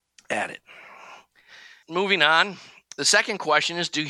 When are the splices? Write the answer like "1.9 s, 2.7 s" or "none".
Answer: 1.8 s